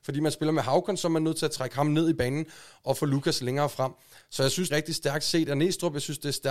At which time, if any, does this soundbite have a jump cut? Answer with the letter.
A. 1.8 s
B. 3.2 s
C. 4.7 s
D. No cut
C